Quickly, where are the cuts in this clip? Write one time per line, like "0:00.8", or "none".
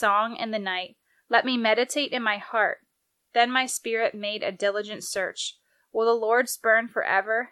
none